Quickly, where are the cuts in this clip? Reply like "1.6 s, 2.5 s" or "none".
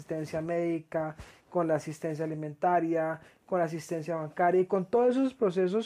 none